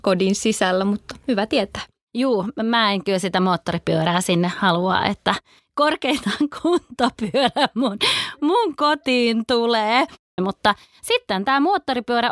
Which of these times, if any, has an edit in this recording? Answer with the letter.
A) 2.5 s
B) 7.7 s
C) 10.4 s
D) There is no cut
C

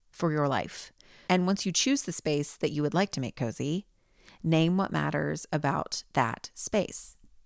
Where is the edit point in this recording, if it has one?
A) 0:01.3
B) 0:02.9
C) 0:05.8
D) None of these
A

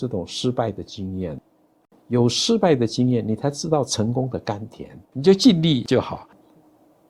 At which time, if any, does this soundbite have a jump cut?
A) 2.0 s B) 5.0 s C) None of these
B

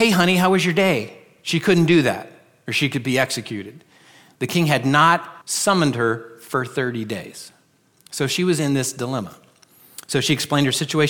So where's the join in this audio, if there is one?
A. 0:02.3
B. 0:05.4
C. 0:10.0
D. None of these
B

